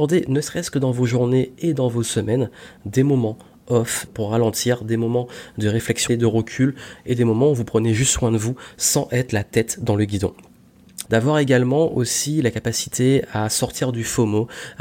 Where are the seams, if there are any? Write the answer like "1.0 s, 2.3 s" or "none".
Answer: 4.1 s, 6.1 s, 11.1 s